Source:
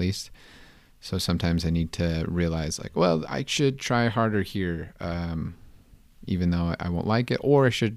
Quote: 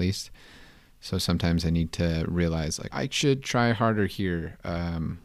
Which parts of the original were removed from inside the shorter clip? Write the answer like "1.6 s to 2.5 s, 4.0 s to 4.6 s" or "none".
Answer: 2.9 s to 3.3 s

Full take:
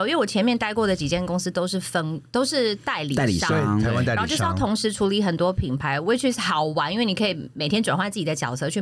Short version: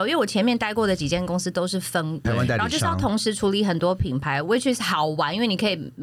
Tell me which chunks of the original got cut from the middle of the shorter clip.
2.2 s to 3.8 s

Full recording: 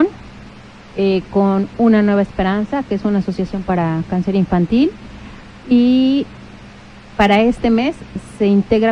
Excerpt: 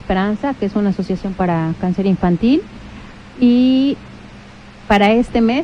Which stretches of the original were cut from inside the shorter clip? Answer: none

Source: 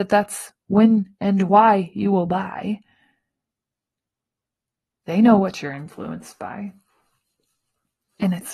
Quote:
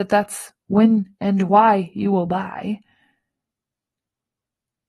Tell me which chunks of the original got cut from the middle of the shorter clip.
none

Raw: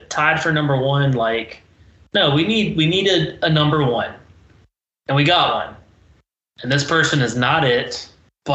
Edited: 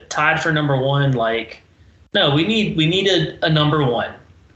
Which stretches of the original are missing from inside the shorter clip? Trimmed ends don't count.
none

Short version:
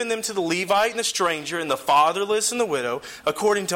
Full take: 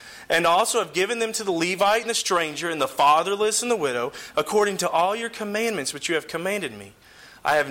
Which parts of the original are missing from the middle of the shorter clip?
none

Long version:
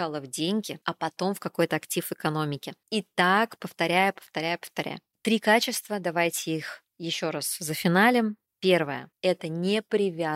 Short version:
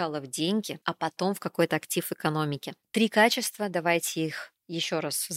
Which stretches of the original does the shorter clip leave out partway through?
2.8 s to 5.1 s

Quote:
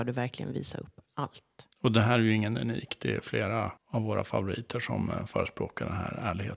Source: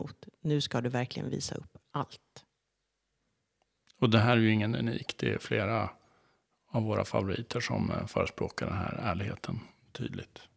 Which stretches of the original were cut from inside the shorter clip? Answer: 2.5 s to 3.9 s, 5.9 s to 6.6 s

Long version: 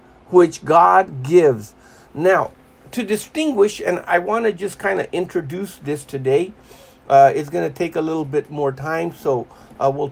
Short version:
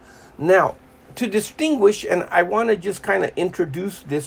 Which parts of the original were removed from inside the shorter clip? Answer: none

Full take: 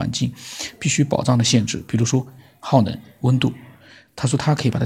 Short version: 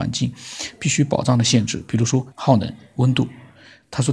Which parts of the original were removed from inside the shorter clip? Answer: 2.3 s to 2.6 s

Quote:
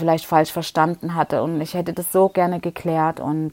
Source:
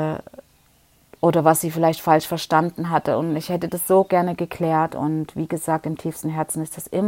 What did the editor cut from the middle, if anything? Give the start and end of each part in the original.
none

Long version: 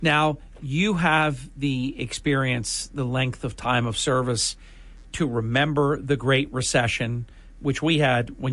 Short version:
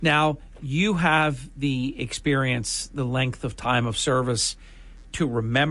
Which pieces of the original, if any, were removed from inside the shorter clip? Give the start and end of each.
none

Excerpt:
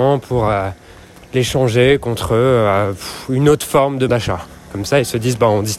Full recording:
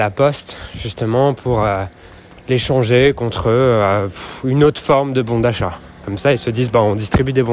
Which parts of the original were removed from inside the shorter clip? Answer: 5.2 s to 5.4 s

